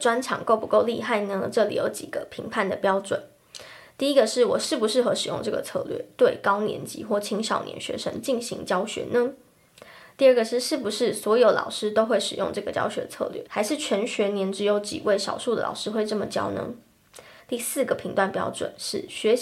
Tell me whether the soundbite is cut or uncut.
cut